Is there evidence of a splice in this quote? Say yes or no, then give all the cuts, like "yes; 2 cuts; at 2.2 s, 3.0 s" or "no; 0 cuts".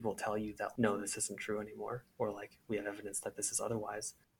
no; 0 cuts